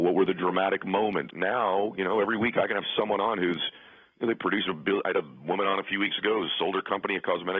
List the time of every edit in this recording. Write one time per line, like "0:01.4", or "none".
0:01.3